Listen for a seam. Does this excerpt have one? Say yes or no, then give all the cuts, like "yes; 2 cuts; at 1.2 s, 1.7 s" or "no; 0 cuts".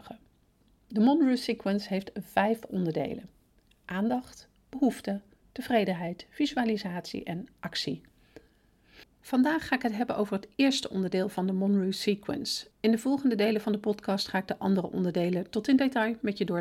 no; 0 cuts